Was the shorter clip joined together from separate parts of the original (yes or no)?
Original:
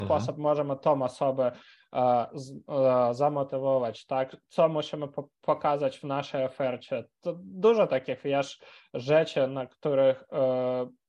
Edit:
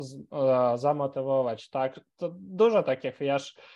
yes